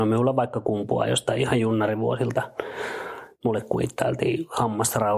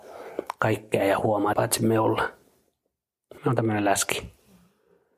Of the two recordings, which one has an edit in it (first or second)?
second